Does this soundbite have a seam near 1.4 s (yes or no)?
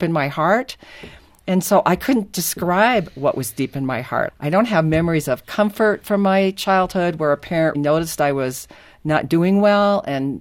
no